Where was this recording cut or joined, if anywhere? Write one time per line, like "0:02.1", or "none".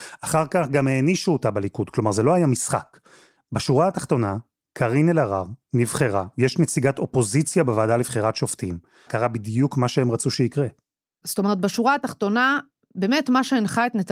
0:09.1
0:11.2